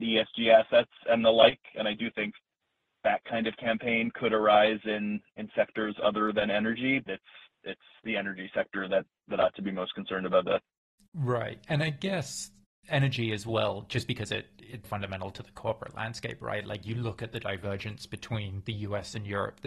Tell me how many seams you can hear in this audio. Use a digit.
2